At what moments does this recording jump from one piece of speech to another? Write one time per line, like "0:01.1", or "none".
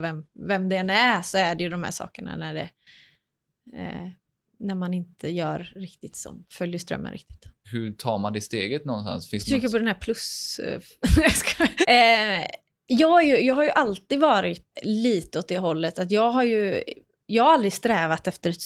0:07.6
0:11.8
0:14.7